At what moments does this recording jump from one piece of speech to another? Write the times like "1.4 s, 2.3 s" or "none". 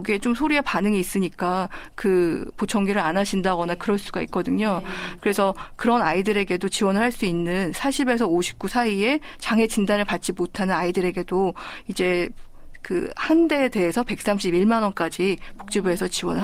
5.2 s